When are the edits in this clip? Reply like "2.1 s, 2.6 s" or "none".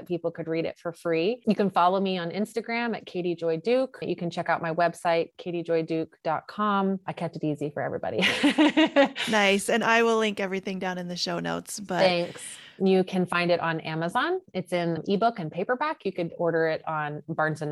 12.8 s